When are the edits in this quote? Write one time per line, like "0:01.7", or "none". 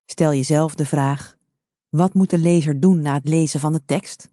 none